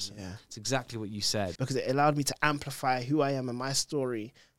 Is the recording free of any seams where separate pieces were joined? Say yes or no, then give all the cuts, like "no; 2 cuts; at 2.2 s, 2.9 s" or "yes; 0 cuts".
no; 1 cut; at 1.6 s